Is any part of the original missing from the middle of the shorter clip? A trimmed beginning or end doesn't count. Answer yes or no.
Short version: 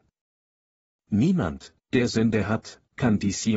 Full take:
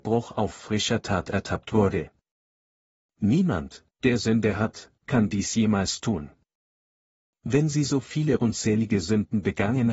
no